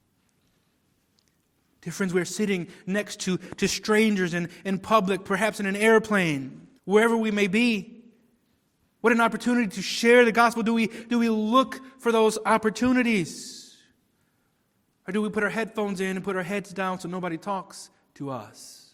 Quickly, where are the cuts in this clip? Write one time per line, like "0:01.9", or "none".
0:06.8

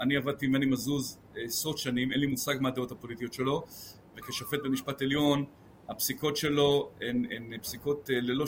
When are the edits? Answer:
none

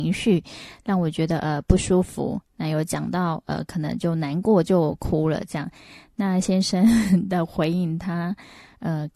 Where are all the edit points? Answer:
none

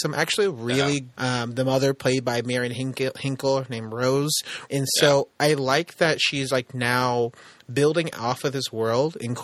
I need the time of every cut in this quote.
0:01.1
0:04.7

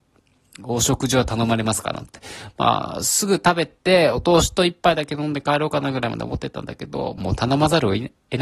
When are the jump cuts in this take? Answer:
0:03.8
0:07.2

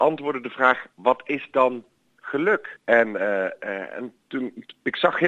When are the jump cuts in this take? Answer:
0:02.8

